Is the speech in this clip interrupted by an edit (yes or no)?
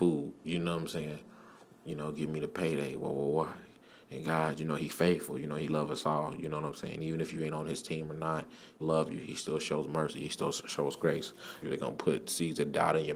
yes